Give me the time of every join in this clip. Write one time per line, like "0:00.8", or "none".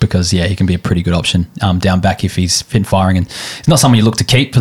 none